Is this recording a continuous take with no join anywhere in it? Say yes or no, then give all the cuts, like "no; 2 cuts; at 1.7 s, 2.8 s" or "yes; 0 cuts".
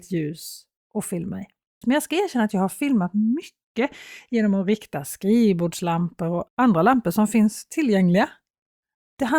no; 2 cuts; at 1.8 s, 6.5 s